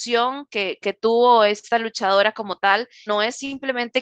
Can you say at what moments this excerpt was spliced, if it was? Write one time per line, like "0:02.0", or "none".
0:03.1